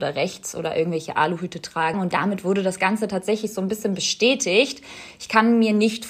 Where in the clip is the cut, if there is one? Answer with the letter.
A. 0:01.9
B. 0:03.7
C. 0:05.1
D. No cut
A